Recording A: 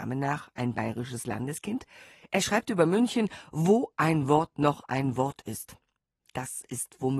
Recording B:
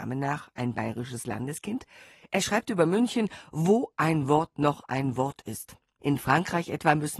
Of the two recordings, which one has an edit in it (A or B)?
B